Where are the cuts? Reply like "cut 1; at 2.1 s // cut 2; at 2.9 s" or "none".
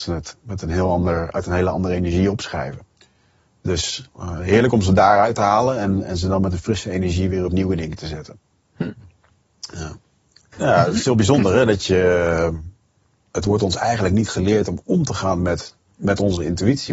cut 1; at 10.5 s